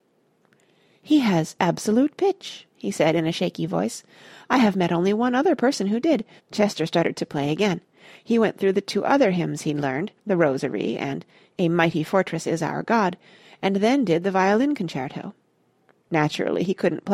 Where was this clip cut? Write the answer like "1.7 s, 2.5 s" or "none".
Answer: 6.4 s, 10.2 s